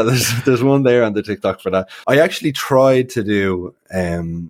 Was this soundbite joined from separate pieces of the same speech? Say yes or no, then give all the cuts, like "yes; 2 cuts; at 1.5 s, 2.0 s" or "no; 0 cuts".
yes; 1 cut; at 2.0 s